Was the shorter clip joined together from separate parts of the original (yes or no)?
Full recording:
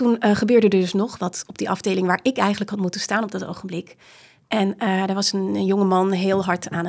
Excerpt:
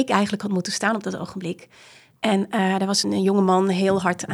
yes